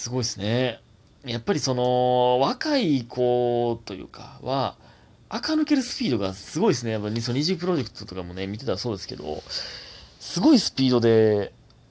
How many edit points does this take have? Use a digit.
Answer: 0